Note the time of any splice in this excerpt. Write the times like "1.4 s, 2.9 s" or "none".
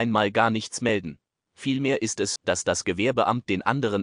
2.4 s